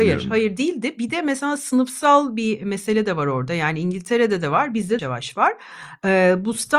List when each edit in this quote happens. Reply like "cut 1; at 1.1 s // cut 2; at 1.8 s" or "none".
cut 1; at 5.0 s